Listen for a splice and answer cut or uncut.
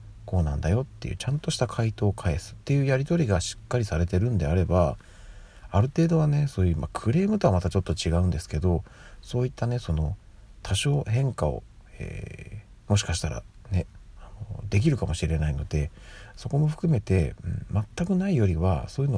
uncut